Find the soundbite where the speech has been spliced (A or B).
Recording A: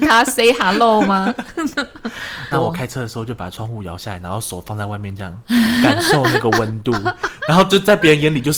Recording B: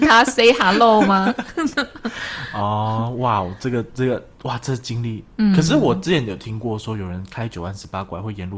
A